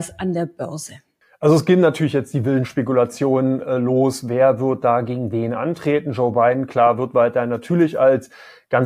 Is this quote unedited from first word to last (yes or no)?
yes